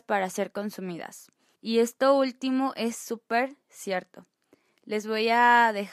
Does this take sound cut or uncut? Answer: cut